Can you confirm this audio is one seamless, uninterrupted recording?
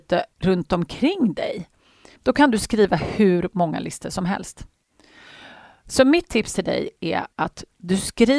no; 1 cut; at 2.2 s

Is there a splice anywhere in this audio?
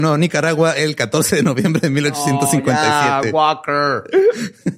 no; 0 cuts

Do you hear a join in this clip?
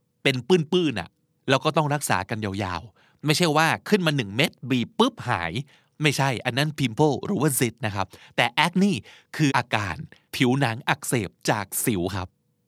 yes; 1 cut; at 9.5 s

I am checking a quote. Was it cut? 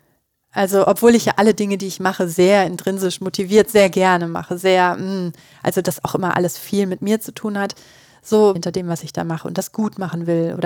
yes; 1 cut; at 8.6 s

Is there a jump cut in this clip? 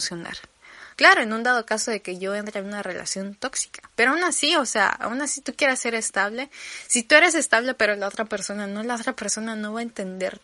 yes; 2 cuts; at 0.9 s, 3.9 s

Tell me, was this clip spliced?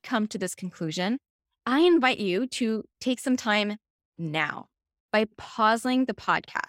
yes; 1 cut; at 1.5 s

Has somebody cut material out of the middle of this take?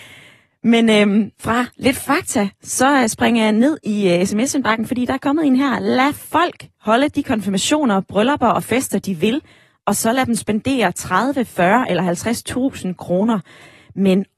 yes; 1 cut; at 1.3 s

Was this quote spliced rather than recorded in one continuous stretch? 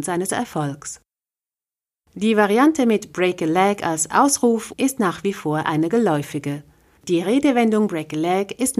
yes; 2 cuts; at 4.7 s, 7.0 s

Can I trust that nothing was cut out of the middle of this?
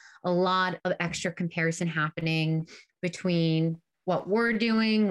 yes; 0 cuts

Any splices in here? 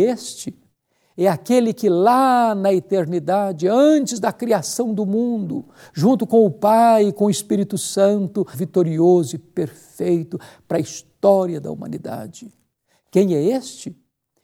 yes; 1 cut; at 8.5 s

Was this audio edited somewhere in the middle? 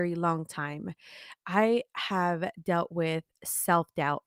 no; 0 cuts

